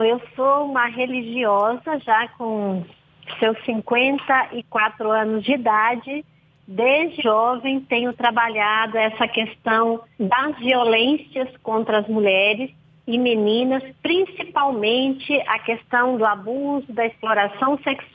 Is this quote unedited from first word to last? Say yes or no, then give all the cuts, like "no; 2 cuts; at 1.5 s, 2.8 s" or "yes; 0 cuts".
no; 1 cut; at 7.2 s